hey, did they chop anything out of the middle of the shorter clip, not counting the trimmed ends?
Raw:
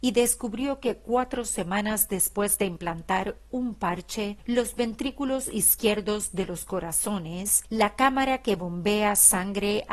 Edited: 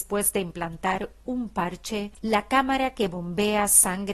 yes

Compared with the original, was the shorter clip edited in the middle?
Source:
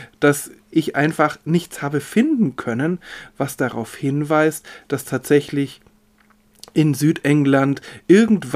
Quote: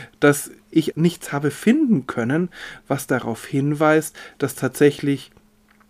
yes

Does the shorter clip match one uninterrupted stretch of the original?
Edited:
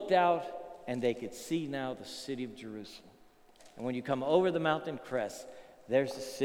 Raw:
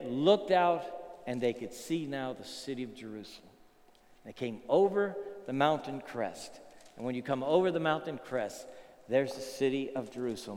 no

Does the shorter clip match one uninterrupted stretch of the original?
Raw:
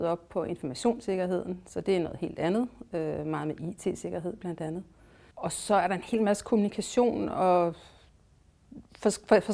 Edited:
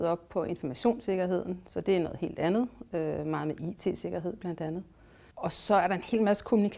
yes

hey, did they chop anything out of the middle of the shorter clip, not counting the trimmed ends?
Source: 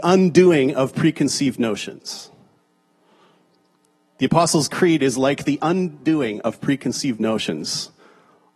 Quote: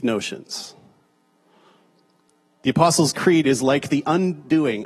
no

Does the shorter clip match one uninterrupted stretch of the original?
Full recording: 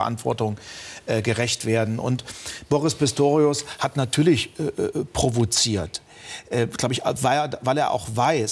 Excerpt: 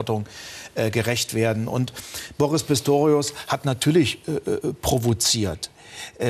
yes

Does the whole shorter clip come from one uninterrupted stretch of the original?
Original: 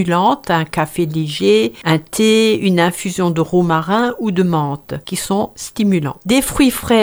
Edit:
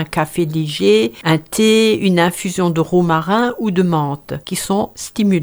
yes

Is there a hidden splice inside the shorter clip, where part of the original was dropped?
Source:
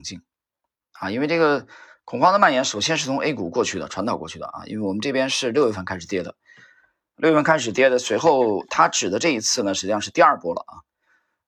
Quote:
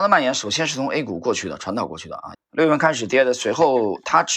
yes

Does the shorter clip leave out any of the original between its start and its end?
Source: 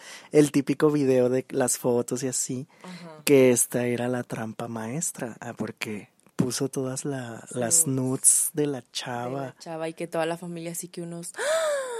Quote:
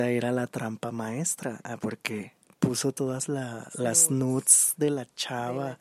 no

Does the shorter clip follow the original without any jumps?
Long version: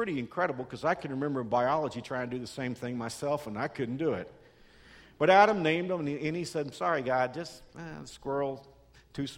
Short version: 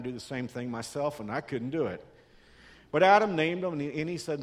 yes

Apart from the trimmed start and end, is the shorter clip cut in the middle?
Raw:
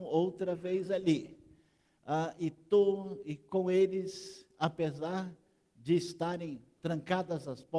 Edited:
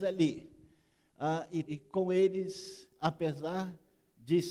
yes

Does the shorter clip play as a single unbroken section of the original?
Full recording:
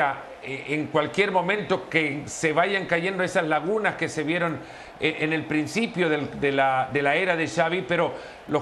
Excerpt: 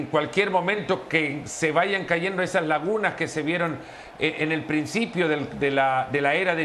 yes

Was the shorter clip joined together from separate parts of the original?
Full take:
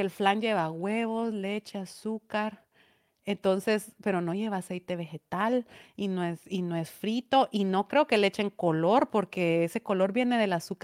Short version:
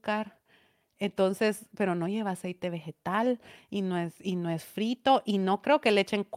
no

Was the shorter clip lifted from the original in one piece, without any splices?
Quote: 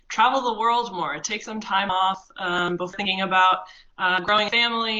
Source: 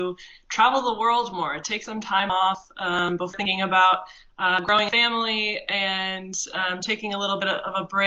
yes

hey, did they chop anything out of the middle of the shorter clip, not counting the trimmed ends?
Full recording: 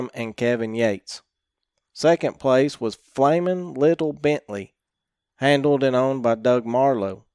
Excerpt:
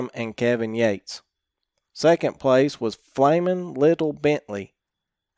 no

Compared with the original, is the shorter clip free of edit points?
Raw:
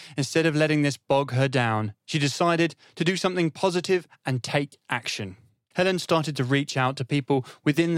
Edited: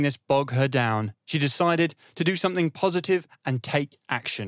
yes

